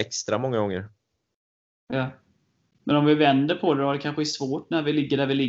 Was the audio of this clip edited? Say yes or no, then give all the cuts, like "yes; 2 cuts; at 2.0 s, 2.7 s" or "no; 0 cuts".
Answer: no; 0 cuts